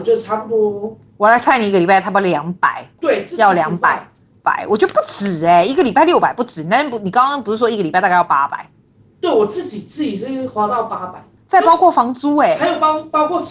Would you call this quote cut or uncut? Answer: uncut